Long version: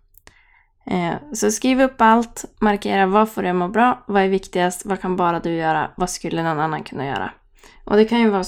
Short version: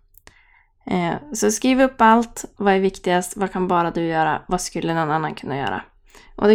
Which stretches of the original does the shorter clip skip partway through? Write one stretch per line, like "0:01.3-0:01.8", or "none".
0:02.6-0:04.0